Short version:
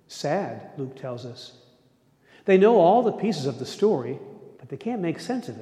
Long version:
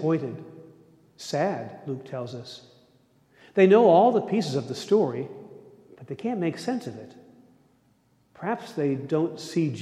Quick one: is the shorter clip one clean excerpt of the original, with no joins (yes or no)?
no